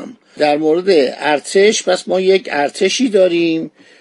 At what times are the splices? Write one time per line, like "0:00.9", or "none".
none